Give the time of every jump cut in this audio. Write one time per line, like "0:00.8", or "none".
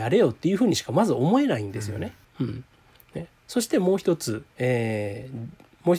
0:02.3
0:04.5